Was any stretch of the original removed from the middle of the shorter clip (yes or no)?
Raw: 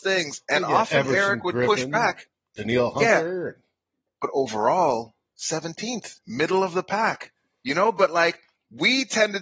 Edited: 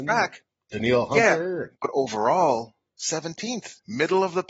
yes